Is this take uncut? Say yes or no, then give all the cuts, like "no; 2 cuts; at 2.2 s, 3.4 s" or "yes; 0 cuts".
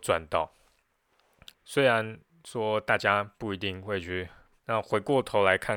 no; 2 cuts; at 1.5 s, 4.5 s